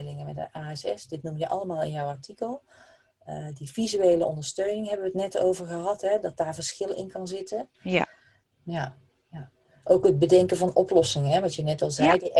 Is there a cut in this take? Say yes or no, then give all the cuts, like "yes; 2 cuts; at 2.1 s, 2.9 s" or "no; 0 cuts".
yes; 1 cut; at 8.4 s